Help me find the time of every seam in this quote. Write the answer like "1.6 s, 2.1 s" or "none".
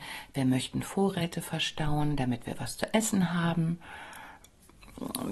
none